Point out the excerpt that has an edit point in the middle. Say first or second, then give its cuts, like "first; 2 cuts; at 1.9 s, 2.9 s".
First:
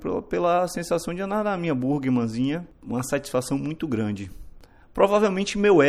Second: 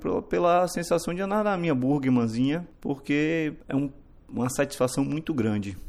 first; 1 cut; at 2.7 s